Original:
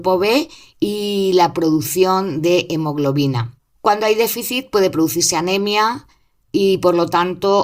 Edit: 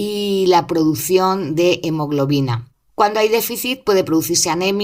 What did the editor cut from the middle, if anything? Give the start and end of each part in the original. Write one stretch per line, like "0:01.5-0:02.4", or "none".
none